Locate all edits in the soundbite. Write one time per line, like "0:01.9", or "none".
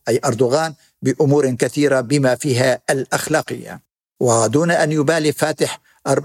0:04.1